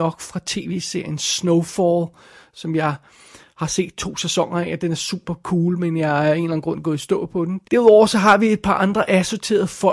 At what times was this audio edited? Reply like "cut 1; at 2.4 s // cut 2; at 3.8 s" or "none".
cut 1; at 7.6 s